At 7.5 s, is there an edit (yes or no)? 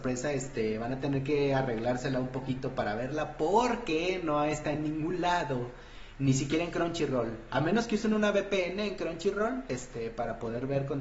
no